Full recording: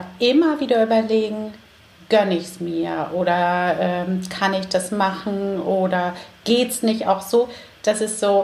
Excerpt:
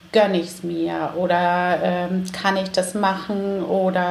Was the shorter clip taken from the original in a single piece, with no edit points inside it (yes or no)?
yes